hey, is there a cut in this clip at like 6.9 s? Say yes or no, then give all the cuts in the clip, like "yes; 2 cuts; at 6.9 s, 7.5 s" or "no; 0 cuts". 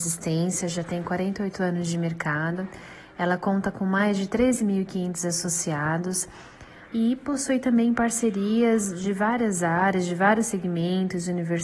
yes; 1 cut; at 6.9 s